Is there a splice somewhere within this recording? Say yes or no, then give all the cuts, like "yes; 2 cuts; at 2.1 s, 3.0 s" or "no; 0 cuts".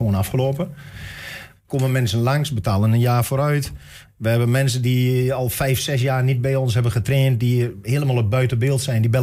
yes; 2 cuts; at 1.5 s, 4.1 s